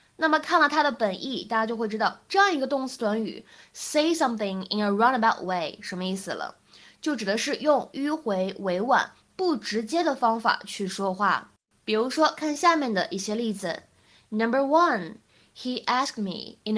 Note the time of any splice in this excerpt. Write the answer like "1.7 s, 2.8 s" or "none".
11.8 s